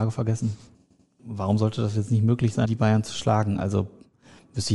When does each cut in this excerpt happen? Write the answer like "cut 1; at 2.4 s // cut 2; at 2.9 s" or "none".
cut 1; at 1.2 s // cut 2; at 2.7 s